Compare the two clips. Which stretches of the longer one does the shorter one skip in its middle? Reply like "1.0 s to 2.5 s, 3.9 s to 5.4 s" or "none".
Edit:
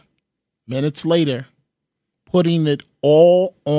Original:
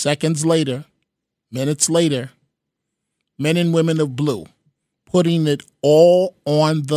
3.0 s to 4.9 s